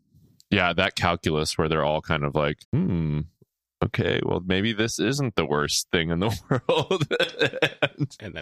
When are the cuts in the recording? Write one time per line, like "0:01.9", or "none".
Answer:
0:02.6